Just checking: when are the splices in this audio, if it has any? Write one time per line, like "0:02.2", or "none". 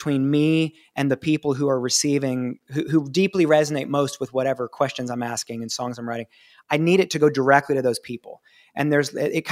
none